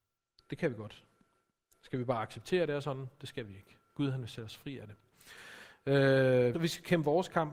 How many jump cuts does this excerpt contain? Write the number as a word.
one